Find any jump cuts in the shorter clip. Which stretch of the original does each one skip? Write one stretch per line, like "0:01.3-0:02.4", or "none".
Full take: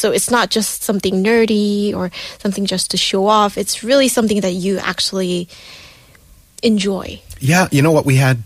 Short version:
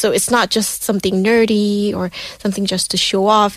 none